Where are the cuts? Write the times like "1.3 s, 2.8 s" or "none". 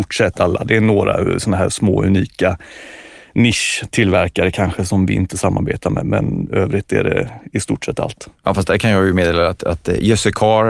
6.0 s